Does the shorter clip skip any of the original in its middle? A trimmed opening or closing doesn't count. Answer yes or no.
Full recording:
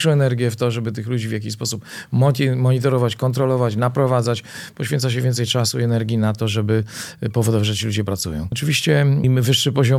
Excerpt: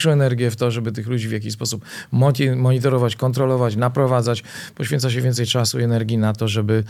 no